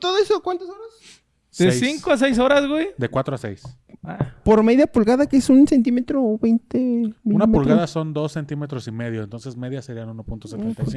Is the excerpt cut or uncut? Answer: uncut